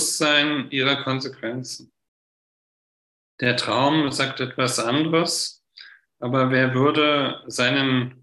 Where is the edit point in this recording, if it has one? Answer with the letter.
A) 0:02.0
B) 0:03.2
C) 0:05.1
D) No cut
D